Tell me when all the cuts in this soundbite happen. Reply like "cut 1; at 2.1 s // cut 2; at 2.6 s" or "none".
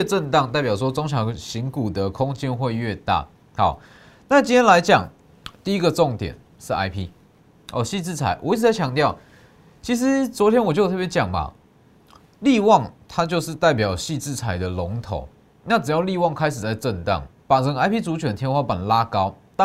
cut 1; at 17.4 s